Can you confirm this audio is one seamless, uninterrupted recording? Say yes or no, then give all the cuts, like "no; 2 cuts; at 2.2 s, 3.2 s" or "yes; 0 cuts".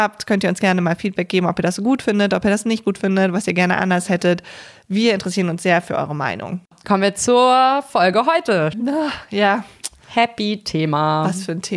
no; 1 cut; at 8.7 s